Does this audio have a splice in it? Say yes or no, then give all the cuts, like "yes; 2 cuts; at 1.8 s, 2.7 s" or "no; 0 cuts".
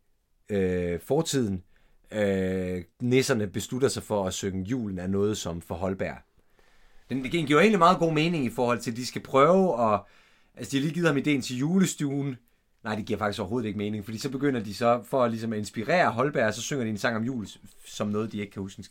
yes; 2 cuts; at 2.9 s, 7.0 s